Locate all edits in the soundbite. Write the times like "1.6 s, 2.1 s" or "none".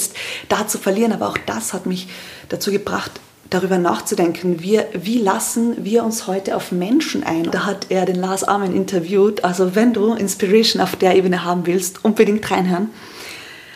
7.5 s